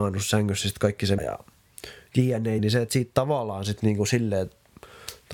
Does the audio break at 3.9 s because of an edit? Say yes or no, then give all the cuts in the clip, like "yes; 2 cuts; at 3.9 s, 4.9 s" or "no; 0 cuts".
no; 2 cuts; at 1.2 s, 2.6 s